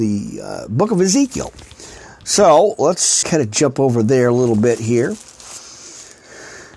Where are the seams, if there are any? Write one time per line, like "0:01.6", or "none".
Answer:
0:03.2